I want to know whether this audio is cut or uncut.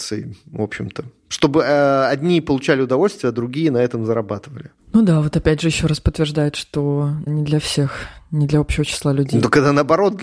uncut